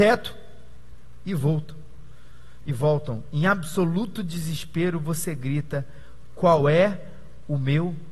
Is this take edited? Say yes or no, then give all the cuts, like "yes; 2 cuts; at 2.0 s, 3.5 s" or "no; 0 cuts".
no; 0 cuts